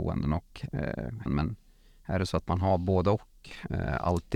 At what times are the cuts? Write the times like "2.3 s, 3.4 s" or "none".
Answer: 1.3 s